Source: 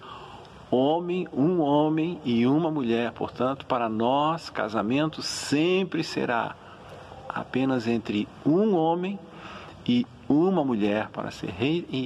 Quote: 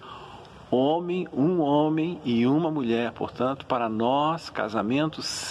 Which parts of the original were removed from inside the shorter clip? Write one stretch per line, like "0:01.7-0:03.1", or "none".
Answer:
none